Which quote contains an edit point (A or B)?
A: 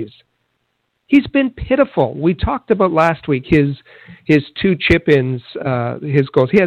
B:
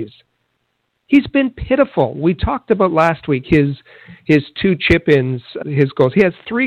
B